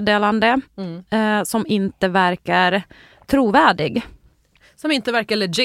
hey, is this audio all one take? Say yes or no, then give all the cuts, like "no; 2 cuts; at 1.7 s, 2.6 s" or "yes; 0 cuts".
yes; 0 cuts